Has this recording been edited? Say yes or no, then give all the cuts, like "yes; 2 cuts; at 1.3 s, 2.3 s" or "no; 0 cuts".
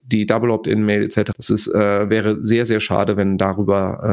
yes; 1 cut; at 1.3 s